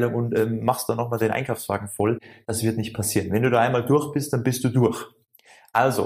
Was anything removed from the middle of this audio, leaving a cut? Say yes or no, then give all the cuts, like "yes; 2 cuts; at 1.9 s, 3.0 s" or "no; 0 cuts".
no; 0 cuts